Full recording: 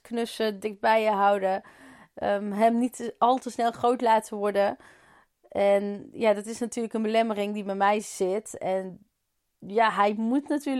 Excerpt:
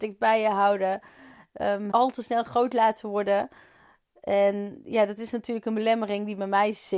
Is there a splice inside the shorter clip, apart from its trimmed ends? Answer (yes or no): yes